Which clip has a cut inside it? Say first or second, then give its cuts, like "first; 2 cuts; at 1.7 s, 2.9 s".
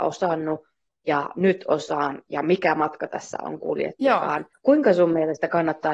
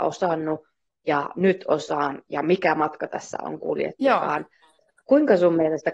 first; 1 cut; at 4.5 s